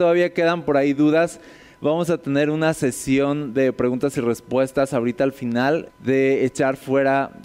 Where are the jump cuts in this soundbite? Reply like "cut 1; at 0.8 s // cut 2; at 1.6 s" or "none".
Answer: cut 1; at 5.9 s